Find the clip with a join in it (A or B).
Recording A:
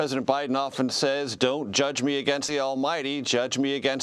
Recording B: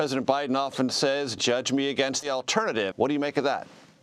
B